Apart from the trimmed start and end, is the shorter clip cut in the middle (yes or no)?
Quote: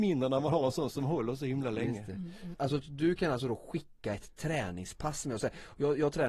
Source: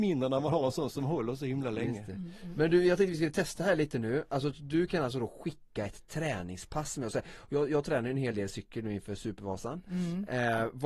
yes